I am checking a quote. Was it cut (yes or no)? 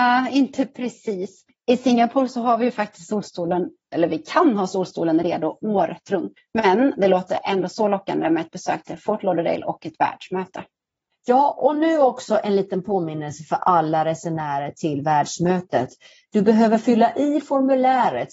no